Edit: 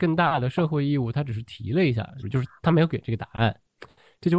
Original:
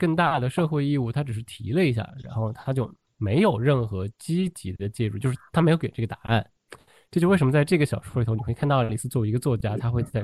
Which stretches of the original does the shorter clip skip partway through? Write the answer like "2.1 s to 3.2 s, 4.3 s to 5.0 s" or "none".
2.2 s to 5.1 s